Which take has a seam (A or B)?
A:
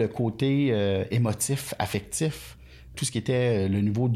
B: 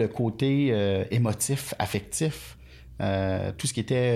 A